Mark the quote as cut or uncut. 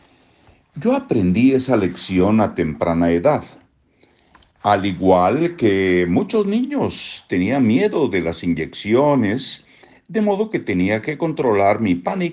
uncut